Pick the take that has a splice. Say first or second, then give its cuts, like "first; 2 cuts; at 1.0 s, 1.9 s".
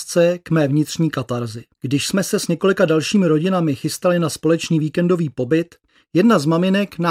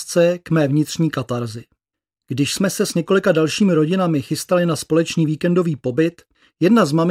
first; 1 cut; at 1.7 s